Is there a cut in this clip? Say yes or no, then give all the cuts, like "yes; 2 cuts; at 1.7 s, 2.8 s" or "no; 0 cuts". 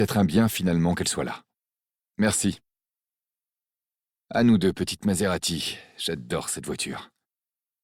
yes; 1 cut; at 2.0 s